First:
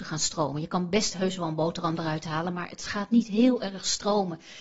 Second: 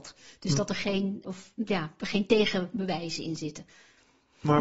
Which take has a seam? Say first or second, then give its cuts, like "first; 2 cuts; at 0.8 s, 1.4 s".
second; 1 cut; at 1.2 s